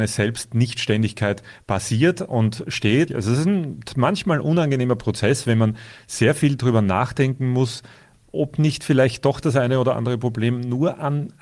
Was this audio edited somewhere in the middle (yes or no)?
yes